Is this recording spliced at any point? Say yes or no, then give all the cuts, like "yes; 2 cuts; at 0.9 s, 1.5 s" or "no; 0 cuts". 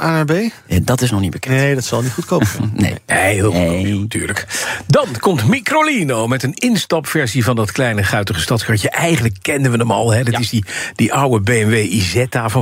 no; 0 cuts